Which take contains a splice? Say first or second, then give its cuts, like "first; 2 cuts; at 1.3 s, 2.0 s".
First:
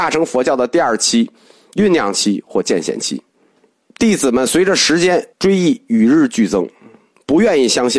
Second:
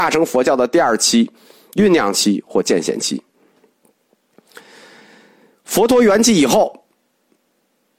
first; 2 cuts; at 3.8 s, 5.3 s